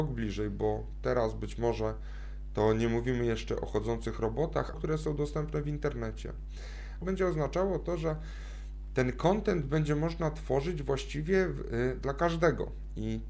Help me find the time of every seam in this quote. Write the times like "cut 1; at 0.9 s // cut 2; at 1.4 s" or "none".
cut 1; at 4.7 s // cut 2; at 7.0 s